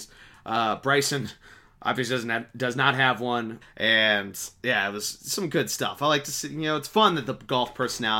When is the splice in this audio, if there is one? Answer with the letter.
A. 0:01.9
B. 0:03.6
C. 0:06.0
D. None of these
B